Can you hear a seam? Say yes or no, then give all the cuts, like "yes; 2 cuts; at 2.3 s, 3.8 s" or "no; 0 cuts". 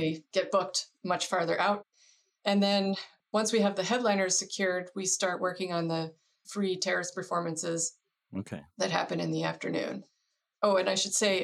no; 0 cuts